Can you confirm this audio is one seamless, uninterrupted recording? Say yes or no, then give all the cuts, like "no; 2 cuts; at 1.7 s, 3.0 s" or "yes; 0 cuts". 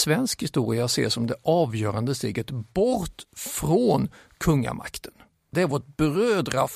no; 1 cut; at 5.5 s